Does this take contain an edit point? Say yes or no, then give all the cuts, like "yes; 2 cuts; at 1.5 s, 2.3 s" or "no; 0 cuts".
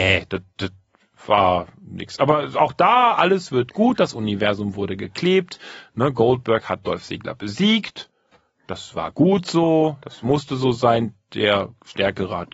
no; 0 cuts